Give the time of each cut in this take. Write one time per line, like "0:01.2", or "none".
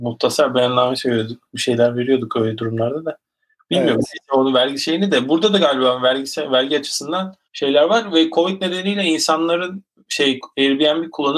0:07.4